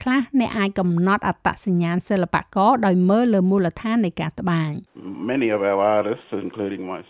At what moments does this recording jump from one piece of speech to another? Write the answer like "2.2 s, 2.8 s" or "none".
4.9 s